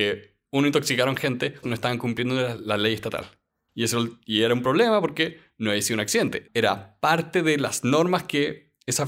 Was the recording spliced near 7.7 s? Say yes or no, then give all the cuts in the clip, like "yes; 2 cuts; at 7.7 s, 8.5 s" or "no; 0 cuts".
no; 3 cuts; at 1.6 s, 3.7 s, 6.5 s